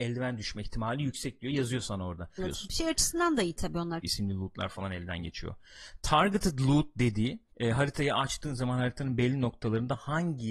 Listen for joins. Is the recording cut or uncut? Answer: cut